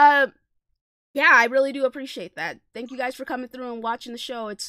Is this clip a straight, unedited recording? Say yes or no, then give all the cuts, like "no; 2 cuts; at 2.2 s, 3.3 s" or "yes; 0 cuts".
yes; 0 cuts